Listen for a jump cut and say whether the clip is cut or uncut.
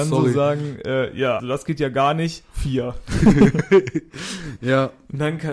cut